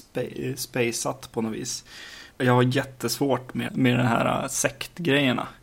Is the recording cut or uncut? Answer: cut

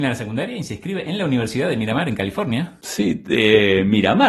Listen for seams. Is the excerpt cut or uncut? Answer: uncut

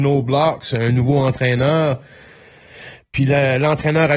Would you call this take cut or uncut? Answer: uncut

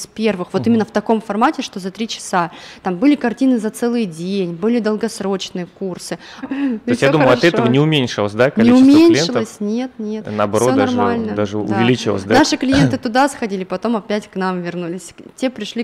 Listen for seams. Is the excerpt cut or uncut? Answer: cut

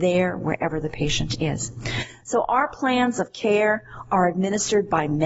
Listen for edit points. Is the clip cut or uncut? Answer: uncut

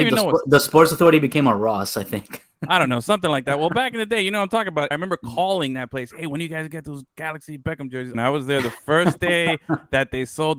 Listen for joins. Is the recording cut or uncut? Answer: cut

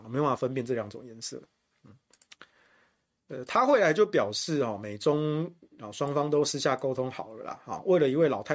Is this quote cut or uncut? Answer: uncut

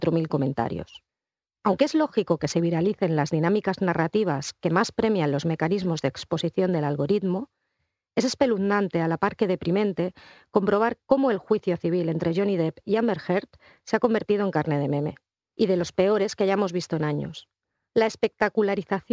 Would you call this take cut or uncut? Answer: uncut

